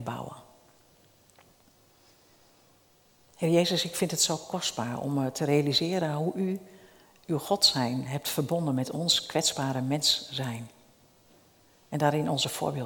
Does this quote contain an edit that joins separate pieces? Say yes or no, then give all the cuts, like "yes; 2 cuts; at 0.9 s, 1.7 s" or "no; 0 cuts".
no; 0 cuts